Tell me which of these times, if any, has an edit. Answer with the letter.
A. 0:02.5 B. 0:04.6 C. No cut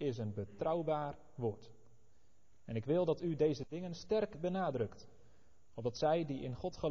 C